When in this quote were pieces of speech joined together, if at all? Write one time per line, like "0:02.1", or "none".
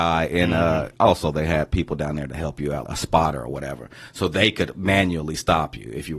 0:00.9
0:02.8

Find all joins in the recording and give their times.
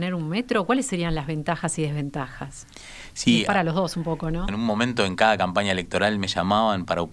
0:04.5

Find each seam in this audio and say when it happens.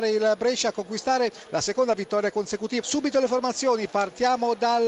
0:02.8

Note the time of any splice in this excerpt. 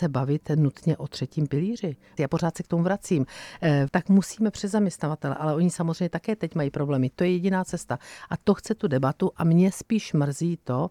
0:02.2
0:03.9

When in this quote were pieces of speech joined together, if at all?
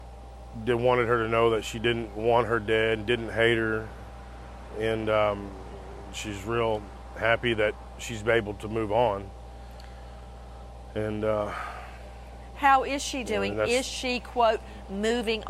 none

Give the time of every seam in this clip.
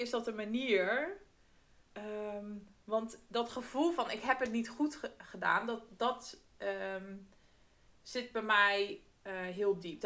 none

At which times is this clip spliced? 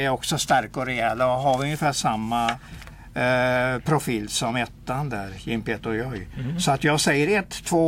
none

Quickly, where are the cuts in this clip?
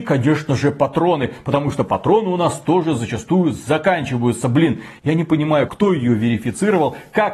0:05.7

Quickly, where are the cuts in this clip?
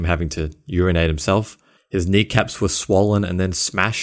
0:01.8

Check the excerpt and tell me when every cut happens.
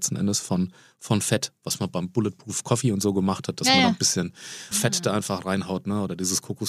0:04.7

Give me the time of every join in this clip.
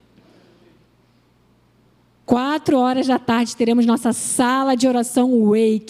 0:02.3

